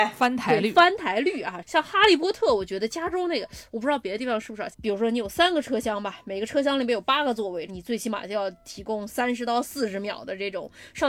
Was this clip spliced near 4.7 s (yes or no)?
yes